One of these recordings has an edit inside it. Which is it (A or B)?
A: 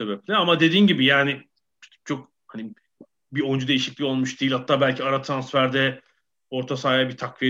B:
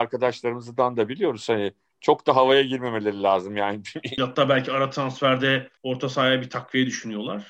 B